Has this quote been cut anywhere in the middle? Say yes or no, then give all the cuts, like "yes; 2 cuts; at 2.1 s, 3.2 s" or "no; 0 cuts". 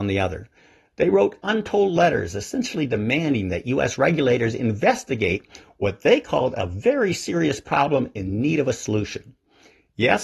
no; 0 cuts